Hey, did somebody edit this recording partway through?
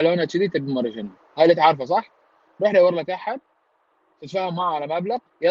no; 0 cuts

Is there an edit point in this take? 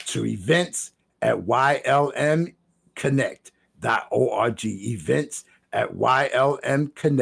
no; 0 cuts

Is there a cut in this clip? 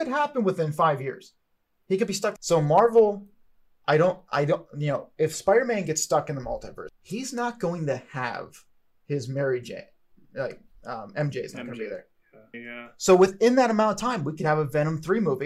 yes; 3 cuts; at 2.4 s, 6.9 s, 12.5 s

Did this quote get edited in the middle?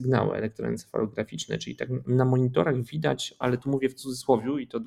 yes; 2 cuts; at 2.0 s, 3.4 s

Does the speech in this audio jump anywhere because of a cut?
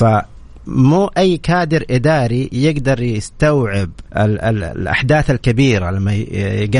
yes; 1 cut; at 4.1 s

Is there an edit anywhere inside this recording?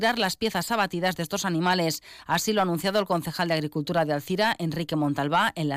no; 0 cuts

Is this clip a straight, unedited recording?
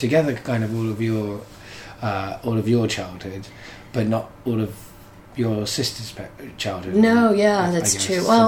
yes; 0 cuts

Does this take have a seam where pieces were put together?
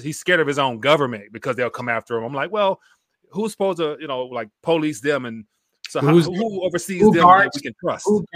no; 0 cuts

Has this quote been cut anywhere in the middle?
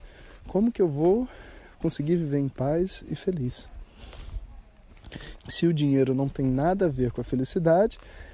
yes; 1 cut; at 5.4 s

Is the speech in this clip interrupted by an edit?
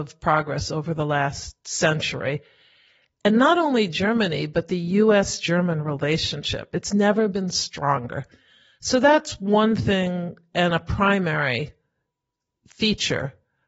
no; 0 cuts

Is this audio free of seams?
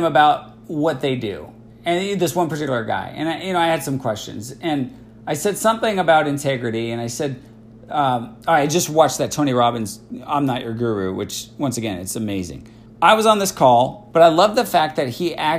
no; 2 cuts; at 12.9 s, 14.1 s

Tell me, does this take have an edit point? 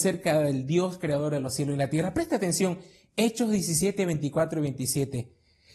no; 0 cuts

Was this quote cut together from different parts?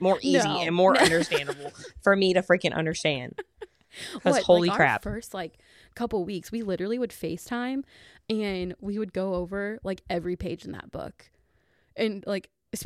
no; 0 cuts

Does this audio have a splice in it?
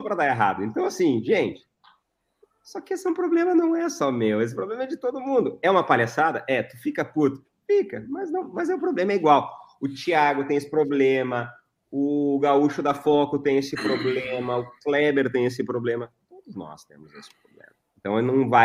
no; 0 cuts

